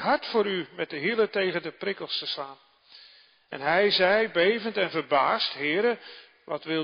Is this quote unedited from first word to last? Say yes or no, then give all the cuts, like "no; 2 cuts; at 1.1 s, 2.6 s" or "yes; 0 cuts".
yes; 0 cuts